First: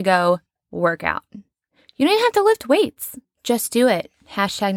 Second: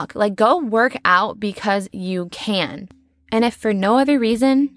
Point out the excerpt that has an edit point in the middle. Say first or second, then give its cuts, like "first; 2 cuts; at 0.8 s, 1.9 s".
first; 1 cut; at 3.2 s